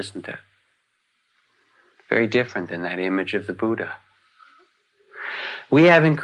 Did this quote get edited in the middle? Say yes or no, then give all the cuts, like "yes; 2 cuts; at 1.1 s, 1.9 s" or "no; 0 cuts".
no; 0 cuts